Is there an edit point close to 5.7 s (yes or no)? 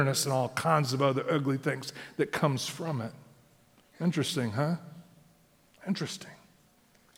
no